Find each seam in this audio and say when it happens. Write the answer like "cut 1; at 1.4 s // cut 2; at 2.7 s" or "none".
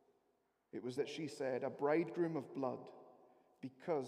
cut 1; at 1.0 s